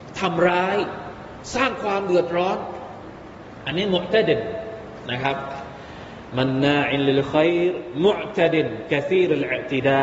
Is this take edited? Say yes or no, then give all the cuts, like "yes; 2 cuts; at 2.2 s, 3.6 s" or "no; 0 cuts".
no; 0 cuts